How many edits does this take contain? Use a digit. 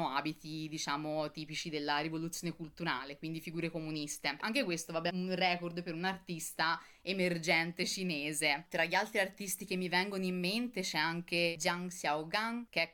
1